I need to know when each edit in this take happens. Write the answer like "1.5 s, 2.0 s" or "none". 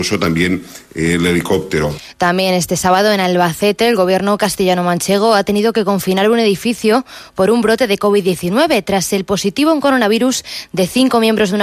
none